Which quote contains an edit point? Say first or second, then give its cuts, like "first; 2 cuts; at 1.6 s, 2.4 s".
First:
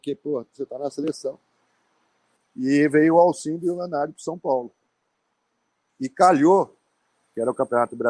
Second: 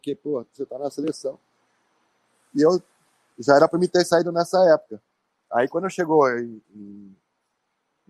first; 1 cut; at 2.4 s